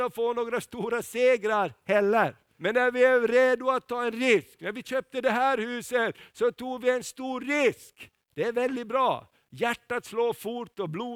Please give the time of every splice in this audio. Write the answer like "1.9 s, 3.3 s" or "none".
2.6 s, 8.3 s